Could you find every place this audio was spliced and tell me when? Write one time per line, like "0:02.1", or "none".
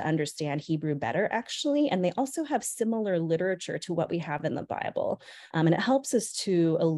0:05.5